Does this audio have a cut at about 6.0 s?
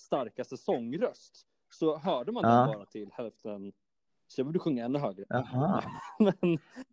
no; 0 cuts

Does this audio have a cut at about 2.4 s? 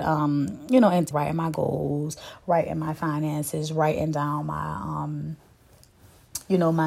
no; 1 cut; at 1.1 s

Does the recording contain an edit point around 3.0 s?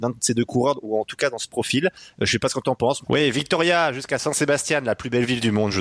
yes; 1 cut; at 3.0 s

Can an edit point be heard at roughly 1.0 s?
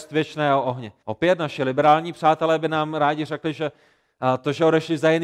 yes; 1 cut; at 1.0 s

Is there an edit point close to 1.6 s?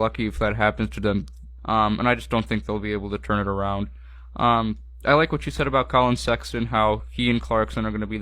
yes; 1 cut; at 1.6 s

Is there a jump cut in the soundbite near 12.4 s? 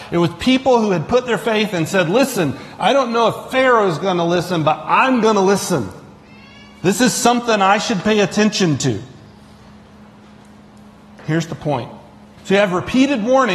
yes; 1 cut; at 12.4 s

